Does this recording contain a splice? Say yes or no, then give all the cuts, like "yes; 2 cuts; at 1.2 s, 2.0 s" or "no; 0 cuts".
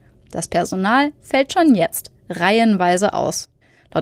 no; 0 cuts